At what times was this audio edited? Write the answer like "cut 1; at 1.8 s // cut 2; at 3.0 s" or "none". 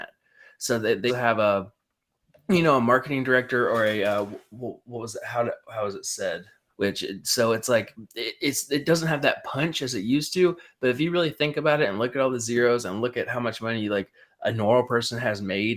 cut 1; at 1.1 s // cut 2; at 6.7 s